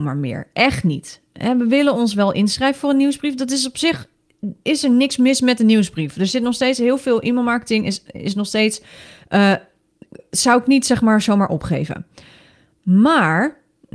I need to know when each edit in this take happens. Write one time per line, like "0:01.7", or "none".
none